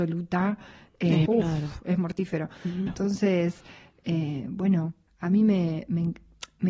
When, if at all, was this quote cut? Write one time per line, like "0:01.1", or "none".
0:01.3
0:02.9
0:05.1